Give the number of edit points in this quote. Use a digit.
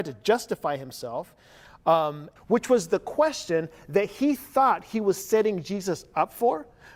1